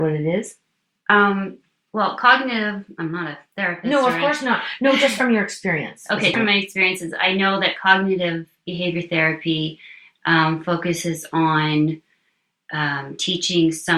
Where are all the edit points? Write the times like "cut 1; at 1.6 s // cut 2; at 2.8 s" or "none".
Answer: cut 1; at 6.3 s